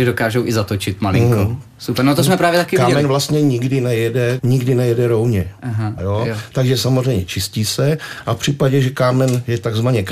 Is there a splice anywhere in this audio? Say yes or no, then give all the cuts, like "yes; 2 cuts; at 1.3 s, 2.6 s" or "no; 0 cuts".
yes; 2 cuts; at 4.4 s, 6.0 s